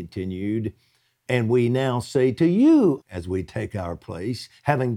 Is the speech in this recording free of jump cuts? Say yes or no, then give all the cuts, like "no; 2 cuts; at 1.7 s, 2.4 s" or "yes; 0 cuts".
no; 2 cuts; at 1.3 s, 3.0 s